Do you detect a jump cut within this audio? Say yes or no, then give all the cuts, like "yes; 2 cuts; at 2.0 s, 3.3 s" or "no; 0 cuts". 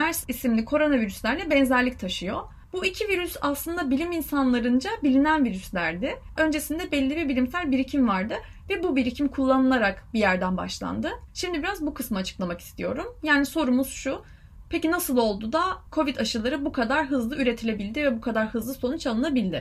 yes; 2 cuts; at 6.4 s, 11.3 s